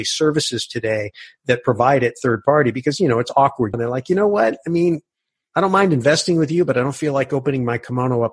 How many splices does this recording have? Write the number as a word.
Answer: one